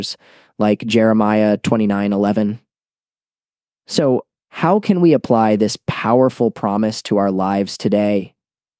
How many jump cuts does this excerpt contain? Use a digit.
0